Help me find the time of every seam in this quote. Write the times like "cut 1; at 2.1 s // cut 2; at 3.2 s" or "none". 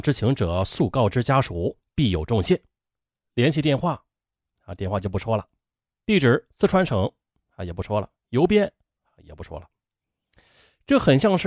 none